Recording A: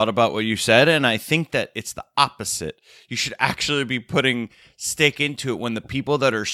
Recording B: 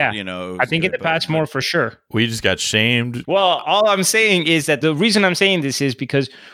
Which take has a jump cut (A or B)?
B